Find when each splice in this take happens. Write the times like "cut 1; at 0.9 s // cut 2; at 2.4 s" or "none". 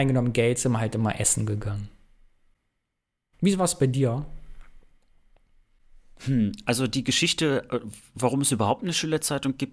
none

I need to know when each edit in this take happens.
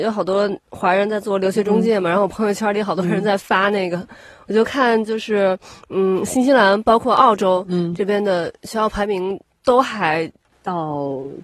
cut 1; at 10.5 s

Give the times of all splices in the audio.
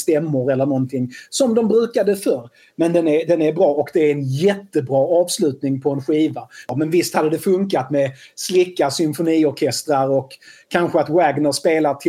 cut 1; at 6.7 s

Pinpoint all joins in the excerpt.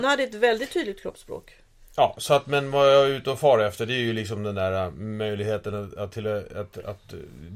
none

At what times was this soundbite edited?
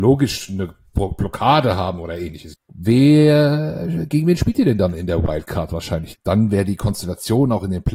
cut 1; at 2.5 s // cut 2; at 6.2 s

